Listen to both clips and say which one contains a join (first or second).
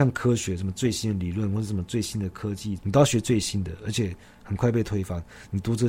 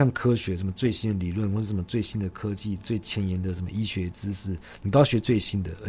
first